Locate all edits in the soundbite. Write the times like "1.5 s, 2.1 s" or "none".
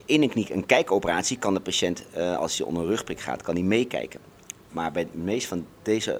none